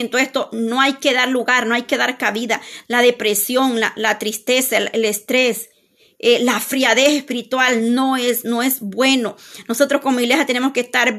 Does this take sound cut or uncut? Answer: uncut